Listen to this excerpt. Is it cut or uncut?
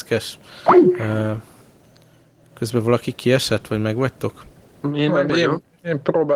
uncut